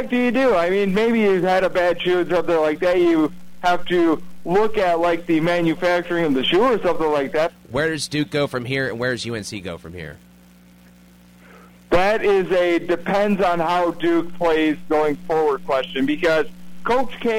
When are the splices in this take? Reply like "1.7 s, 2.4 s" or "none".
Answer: 7.5 s